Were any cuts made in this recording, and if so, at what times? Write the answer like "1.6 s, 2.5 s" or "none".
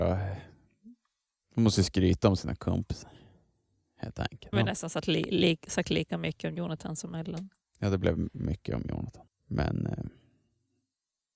4.5 s, 9.3 s